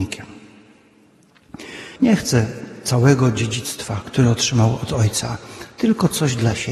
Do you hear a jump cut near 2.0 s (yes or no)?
yes